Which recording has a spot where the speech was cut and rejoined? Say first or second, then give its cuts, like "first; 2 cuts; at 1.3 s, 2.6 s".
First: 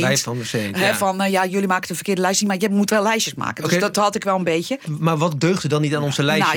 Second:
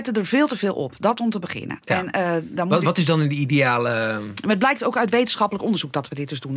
first; 1 cut; at 4.8 s